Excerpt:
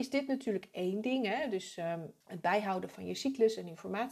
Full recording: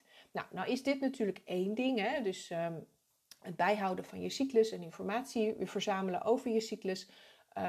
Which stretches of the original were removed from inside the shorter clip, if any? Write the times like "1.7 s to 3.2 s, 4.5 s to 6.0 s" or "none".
2.9 s to 3.4 s